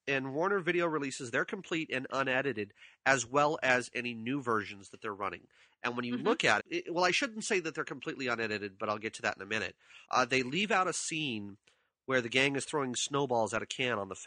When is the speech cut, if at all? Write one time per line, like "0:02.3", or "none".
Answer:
0:06.6
0:10.0